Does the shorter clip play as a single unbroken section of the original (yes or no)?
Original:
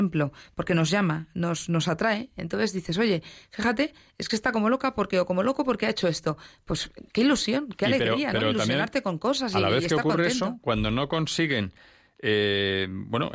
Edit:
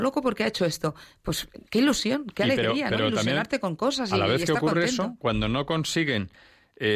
yes